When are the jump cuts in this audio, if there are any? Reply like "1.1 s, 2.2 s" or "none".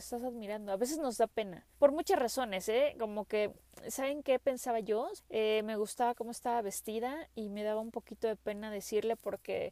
1.7 s, 5.2 s

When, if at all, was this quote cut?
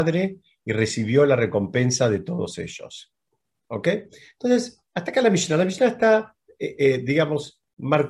none

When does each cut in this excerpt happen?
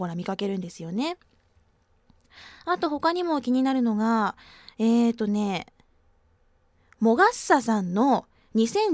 none

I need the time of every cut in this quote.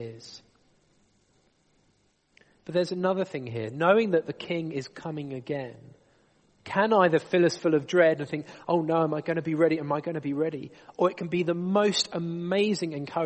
none

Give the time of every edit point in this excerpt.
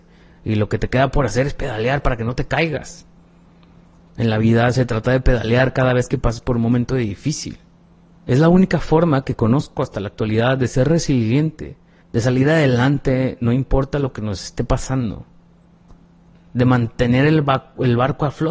4.1 s, 8.1 s, 12.0 s

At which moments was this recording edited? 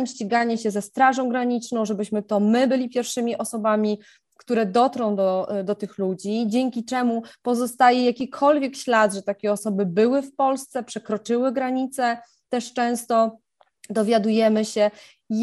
none

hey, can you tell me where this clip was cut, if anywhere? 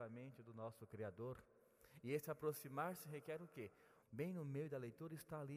4.0 s

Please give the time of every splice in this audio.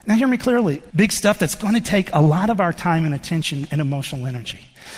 0.9 s

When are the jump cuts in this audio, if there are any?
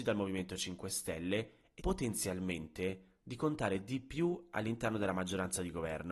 1.8 s

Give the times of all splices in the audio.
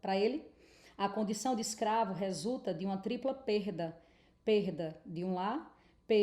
none

